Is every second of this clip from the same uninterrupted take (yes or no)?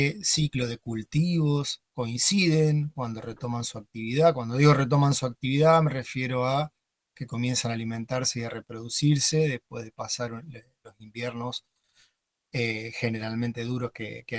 yes